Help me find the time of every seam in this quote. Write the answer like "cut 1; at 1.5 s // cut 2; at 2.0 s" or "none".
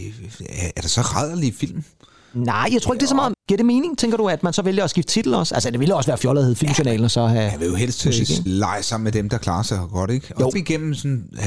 cut 1; at 3.3 s // cut 2; at 8.5 s // cut 3; at 10.5 s